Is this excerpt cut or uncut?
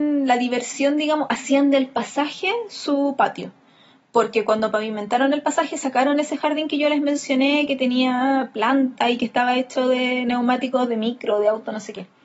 uncut